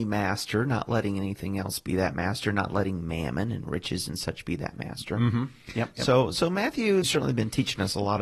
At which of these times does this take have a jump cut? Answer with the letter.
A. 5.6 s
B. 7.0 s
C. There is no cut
B